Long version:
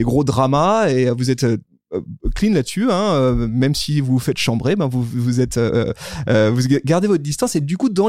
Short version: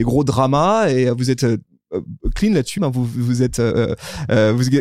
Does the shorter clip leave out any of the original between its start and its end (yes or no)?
yes